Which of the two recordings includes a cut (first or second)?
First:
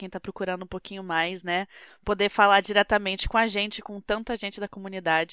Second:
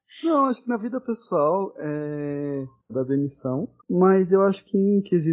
second